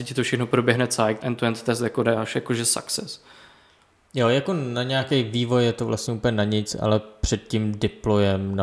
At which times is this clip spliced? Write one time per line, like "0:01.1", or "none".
0:01.2